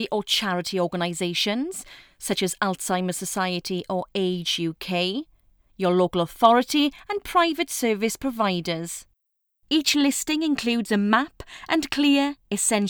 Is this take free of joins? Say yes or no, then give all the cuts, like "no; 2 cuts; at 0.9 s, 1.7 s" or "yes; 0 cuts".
yes; 0 cuts